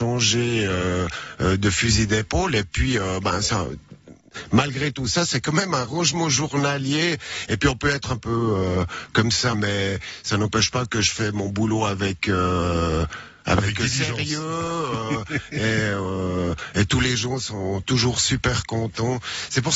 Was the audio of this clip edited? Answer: yes; 1 cut; at 9.5 s

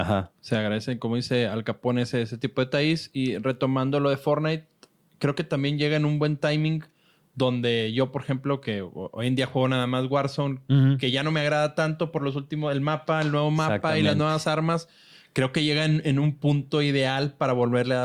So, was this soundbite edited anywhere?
no; 0 cuts

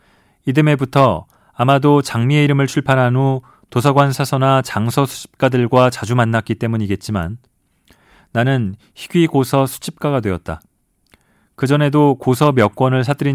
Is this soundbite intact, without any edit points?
yes; 0 cuts

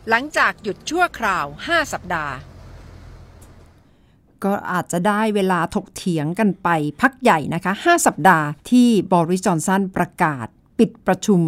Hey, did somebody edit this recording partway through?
yes; 1 cut; at 8.6 s

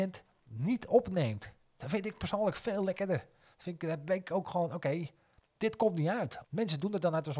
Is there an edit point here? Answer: yes; 1 cut; at 6.4 s

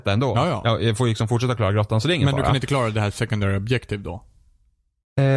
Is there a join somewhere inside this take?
no; 0 cuts

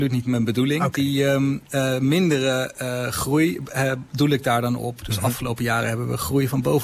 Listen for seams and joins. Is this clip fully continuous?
yes; 0 cuts

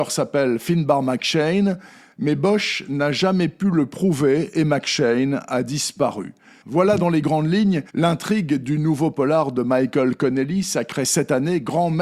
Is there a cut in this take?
yes; 2 cuts; at 6.6 s, 7.9 s

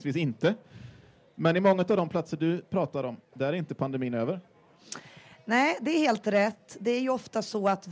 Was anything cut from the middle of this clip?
no; 0 cuts

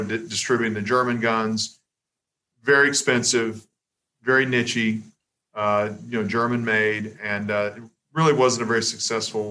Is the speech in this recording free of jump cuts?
yes; 0 cuts

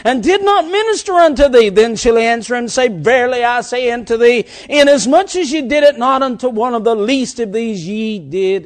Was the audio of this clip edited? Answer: no; 0 cuts

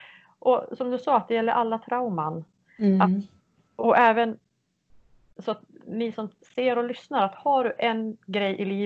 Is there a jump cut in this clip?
no; 0 cuts

